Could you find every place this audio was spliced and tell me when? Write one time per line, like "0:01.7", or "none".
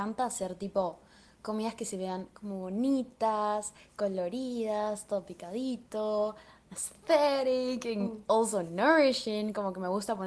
none